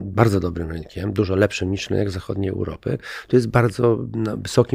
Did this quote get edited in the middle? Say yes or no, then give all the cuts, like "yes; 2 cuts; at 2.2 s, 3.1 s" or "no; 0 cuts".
no; 0 cuts